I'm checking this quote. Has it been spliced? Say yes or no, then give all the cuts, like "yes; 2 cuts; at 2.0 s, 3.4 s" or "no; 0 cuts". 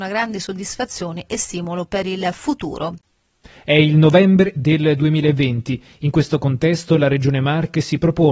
yes; 1 cut; at 3.6 s